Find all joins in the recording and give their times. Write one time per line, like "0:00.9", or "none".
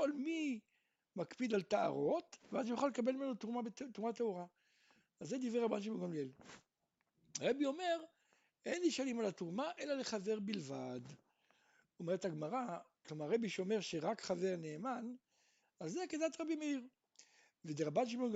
0:13.0
0:15.6